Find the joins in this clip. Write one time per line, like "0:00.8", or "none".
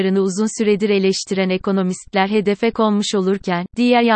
none